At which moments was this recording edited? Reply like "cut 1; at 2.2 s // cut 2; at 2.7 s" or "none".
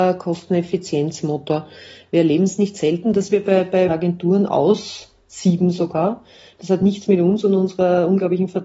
cut 1; at 3.9 s